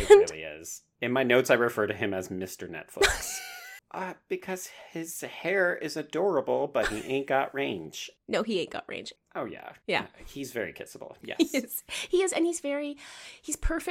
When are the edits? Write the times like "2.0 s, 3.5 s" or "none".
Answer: 3.8 s, 9.2 s